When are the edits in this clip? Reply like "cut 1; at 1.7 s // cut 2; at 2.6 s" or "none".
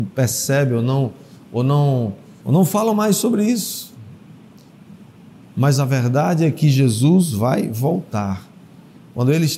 cut 1; at 2.4 s